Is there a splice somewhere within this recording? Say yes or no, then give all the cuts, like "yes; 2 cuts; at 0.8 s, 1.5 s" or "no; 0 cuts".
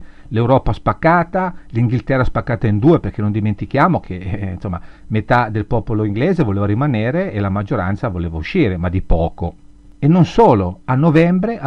no; 0 cuts